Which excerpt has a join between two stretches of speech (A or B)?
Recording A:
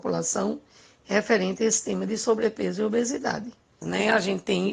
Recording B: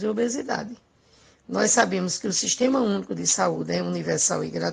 A